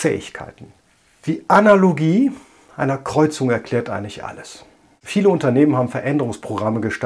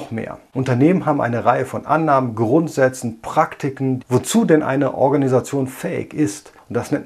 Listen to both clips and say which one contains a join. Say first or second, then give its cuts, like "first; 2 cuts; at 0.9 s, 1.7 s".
second; 1 cut; at 4.0 s